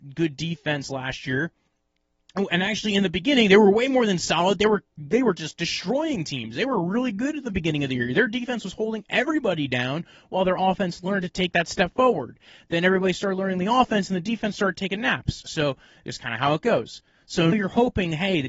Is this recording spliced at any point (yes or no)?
yes